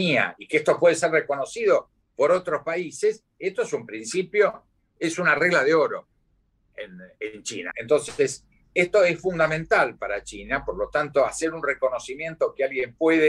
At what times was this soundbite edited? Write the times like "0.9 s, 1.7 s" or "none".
7.7 s